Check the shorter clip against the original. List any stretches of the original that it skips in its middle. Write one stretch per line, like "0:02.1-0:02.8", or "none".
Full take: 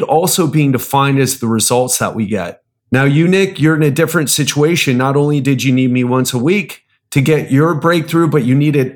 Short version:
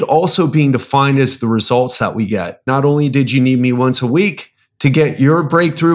0:02.7-0:05.0